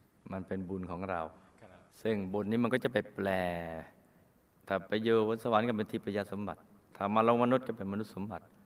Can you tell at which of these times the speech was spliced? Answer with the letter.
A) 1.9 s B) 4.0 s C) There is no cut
A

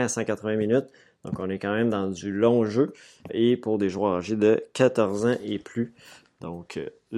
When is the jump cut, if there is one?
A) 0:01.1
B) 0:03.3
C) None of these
B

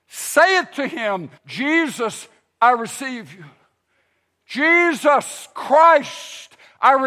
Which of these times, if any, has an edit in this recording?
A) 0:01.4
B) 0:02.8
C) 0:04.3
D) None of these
A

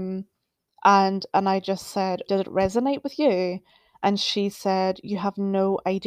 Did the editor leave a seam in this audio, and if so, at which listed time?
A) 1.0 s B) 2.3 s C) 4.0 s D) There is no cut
B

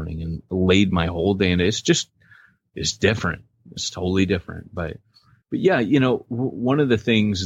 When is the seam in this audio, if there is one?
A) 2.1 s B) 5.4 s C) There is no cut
B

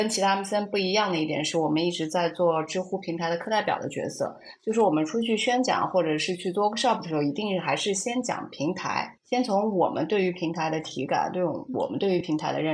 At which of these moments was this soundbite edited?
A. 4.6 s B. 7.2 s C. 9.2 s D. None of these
C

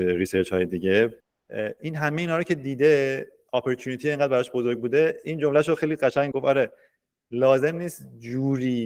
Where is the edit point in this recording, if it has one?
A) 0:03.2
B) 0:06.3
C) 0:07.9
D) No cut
B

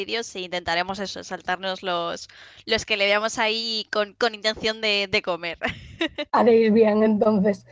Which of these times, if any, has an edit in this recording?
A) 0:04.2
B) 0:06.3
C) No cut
C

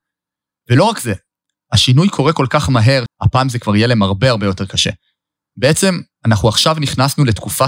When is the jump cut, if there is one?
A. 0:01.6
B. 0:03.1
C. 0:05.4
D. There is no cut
B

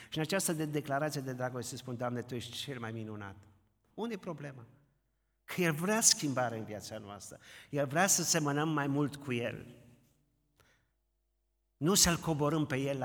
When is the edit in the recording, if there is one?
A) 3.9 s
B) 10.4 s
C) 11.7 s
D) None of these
A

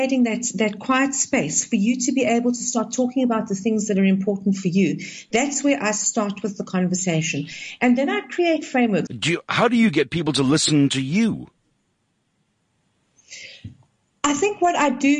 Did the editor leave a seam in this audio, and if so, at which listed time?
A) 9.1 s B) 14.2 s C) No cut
A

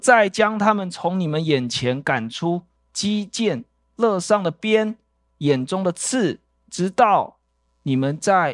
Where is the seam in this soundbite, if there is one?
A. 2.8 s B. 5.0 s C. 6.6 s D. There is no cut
A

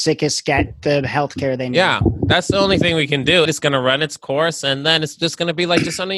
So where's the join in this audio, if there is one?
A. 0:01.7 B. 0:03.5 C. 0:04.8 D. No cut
B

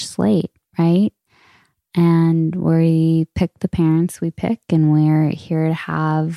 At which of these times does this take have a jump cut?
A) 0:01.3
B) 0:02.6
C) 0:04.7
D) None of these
D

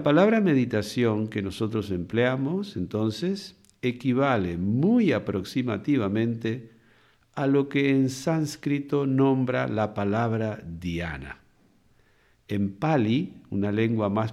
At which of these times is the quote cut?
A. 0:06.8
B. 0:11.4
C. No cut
C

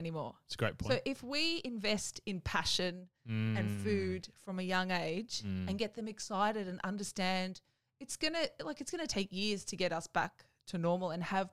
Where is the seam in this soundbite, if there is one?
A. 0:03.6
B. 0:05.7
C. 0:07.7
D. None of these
D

